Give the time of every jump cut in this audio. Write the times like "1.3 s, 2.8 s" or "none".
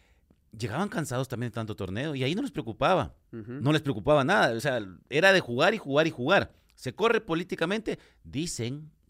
none